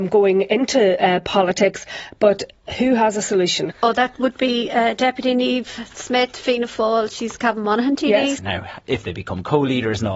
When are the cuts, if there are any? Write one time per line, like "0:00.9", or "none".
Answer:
0:03.7
0:08.4